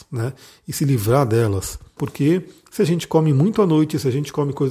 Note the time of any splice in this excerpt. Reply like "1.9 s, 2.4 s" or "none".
2.0 s